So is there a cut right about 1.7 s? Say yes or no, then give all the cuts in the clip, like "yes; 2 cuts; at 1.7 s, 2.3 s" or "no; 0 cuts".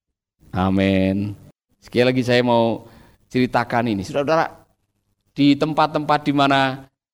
yes; 1 cut; at 1.7 s